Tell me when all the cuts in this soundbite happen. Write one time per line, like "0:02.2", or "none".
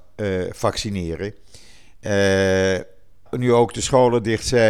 0:03.3